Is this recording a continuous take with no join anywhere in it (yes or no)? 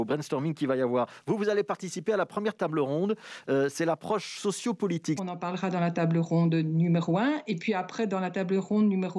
no